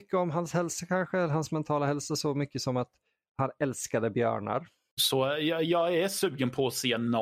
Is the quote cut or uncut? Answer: cut